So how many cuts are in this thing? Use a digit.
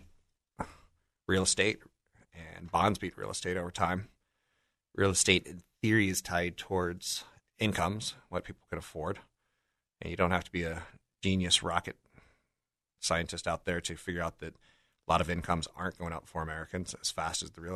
0